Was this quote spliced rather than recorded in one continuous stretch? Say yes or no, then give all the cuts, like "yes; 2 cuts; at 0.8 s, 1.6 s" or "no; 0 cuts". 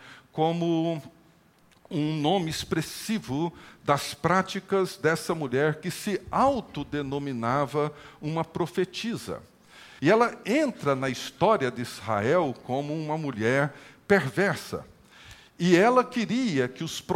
yes; 1 cut; at 10.0 s